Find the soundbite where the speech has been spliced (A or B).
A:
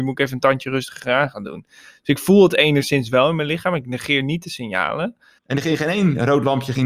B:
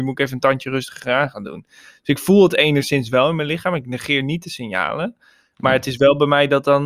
A